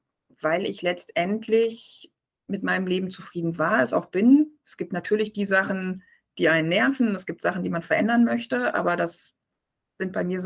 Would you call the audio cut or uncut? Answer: uncut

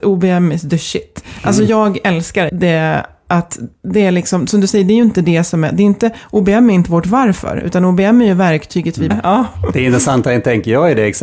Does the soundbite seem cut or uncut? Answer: cut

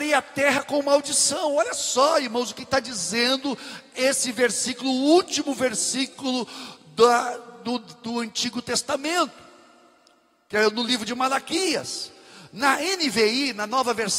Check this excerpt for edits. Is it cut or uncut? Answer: uncut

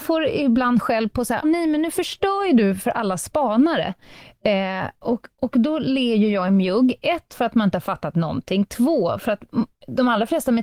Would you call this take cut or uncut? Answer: cut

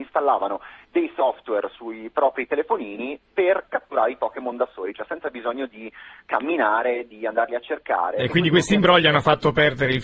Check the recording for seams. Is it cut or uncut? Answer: uncut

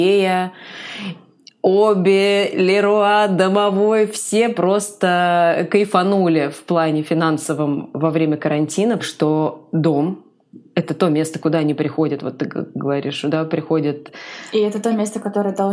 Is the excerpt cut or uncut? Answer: cut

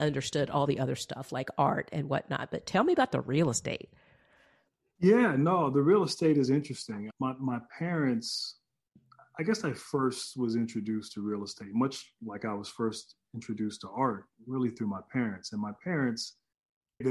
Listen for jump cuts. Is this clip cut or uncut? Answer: uncut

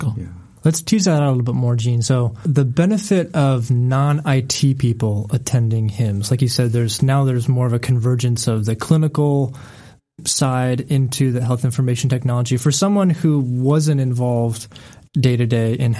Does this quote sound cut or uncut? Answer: uncut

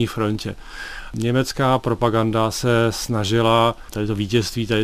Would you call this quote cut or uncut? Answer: uncut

